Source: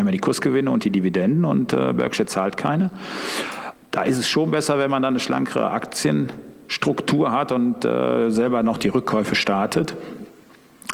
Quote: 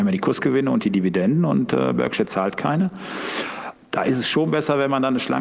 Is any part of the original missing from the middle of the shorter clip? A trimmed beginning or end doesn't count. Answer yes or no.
no